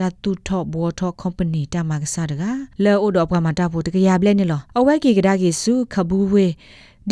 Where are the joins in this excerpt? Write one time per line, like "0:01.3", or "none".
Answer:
0:02.7
0:04.7

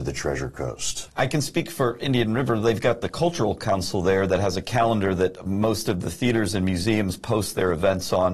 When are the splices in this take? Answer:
0:01.1

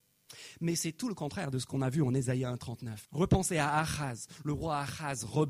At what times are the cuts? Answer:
0:03.0

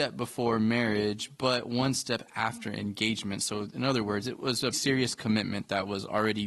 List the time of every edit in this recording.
0:04.7

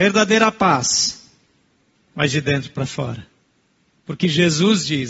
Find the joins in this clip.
0:01.9

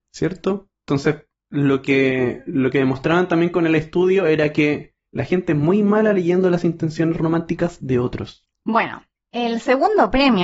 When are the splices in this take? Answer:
0:05.1
0:08.5

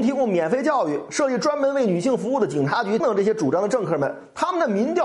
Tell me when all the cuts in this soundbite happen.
0:03.0

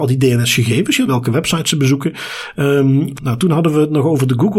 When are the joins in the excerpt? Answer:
0:01.1
0:03.2

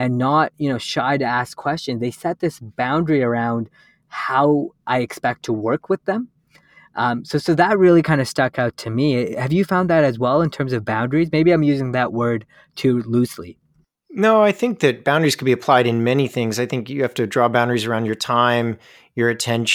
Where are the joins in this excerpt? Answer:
none

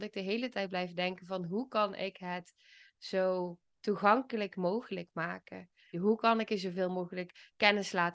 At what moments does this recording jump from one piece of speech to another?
0:05.9

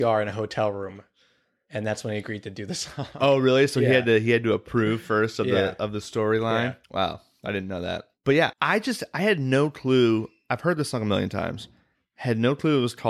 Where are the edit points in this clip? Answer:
0:06.8
0:08.5

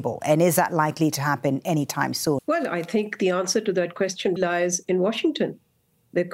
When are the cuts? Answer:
0:02.4
0:04.4

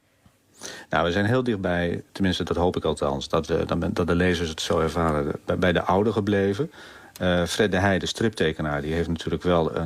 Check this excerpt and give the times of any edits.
none

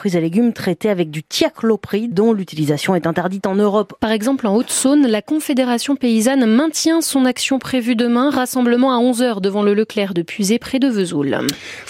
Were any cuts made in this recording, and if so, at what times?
0:02.1
0:04.0

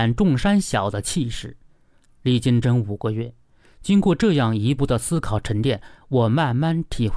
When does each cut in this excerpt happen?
0:02.6
0:04.8

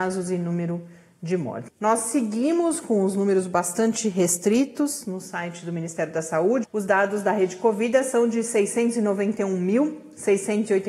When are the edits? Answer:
0:01.7
0:06.6

